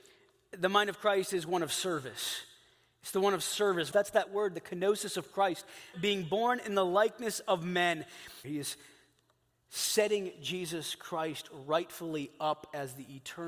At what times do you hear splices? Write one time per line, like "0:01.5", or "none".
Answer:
0:03.9
0:05.9
0:08.4